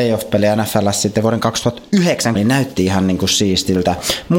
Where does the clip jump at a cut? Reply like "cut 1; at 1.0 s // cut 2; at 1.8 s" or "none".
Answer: cut 1; at 2.3 s

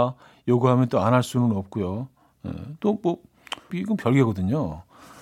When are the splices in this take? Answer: cut 1; at 3.7 s

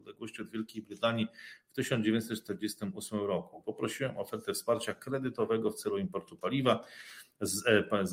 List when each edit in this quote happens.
cut 1; at 3.6 s

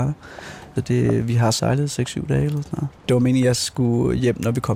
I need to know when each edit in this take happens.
cut 1; at 3.0 s

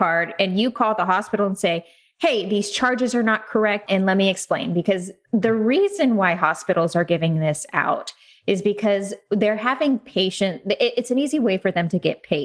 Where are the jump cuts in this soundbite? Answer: cut 1; at 3.9 s

